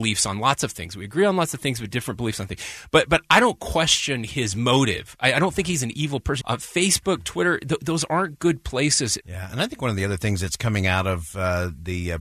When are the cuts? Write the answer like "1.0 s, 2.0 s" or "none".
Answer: 6.4 s, 9.2 s